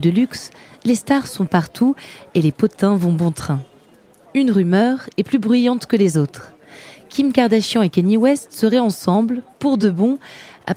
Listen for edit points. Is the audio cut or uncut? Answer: uncut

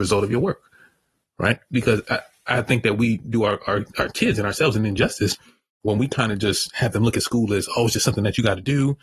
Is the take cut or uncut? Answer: uncut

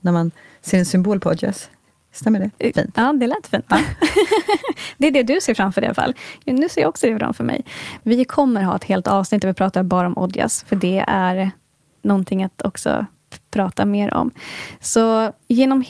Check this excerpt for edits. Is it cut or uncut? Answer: cut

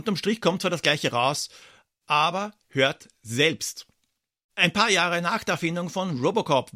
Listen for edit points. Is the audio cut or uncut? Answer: cut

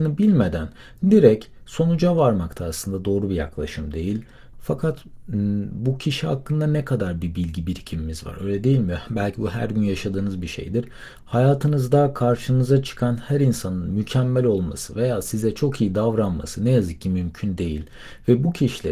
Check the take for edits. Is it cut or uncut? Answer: cut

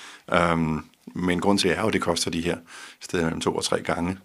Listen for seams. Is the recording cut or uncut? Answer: cut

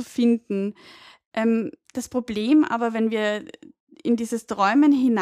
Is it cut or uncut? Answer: uncut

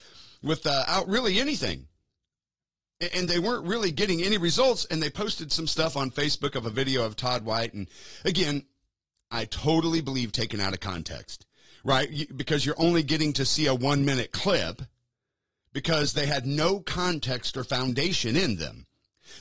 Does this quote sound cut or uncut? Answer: uncut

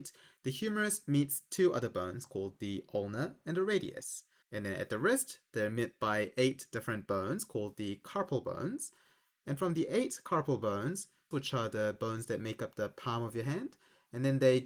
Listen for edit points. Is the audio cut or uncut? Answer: cut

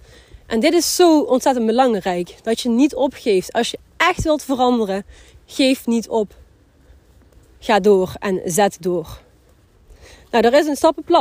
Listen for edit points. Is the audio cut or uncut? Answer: cut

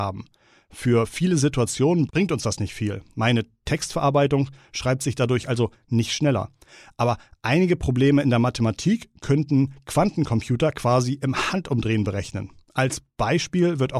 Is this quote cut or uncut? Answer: uncut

